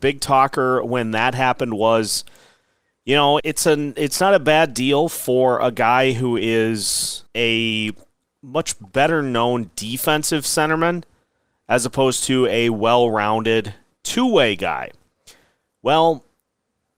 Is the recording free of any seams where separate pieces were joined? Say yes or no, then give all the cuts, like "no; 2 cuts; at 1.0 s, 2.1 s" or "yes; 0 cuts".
no; 2 cuts; at 3.4 s, 7.3 s